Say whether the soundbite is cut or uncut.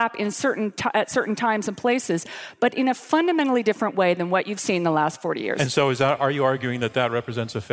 uncut